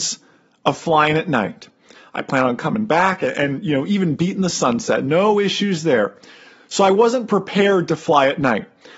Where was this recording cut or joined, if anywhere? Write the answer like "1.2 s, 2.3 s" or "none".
none